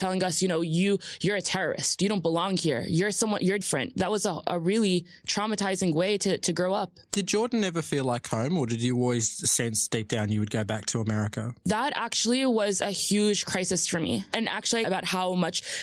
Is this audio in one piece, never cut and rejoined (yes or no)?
no